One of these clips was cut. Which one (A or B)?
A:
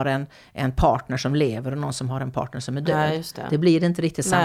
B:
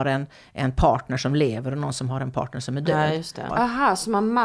B